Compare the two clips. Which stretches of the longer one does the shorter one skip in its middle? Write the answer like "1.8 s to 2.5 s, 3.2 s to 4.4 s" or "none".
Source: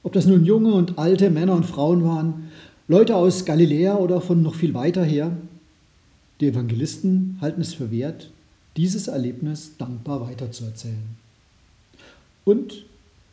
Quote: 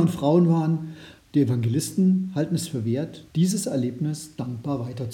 2.7 s to 6.2 s, 8.3 s to 8.7 s